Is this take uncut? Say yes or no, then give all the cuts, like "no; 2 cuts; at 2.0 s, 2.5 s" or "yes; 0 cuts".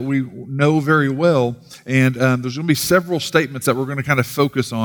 yes; 0 cuts